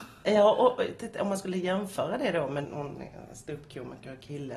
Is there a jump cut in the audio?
yes; 1 cut; at 2.6 s

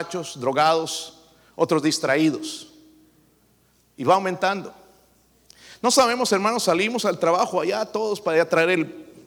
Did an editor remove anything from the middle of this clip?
no; 0 cuts

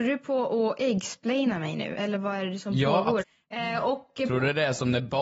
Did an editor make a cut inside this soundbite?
yes; 1 cut; at 3.2 s

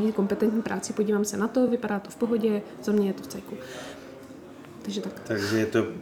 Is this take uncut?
yes; 0 cuts

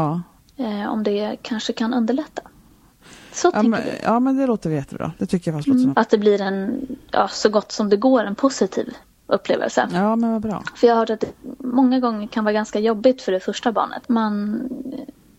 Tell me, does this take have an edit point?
yes; 2 cuts; at 5.9 s, 14.0 s

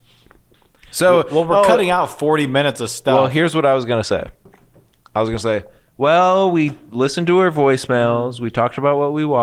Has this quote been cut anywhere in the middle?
no; 0 cuts

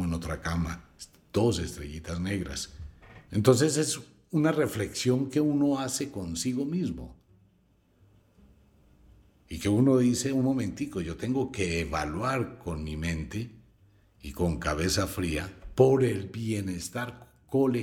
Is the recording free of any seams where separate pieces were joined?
yes; 0 cuts

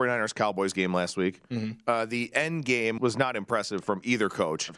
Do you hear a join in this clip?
yes; 1 cut; at 3.0 s

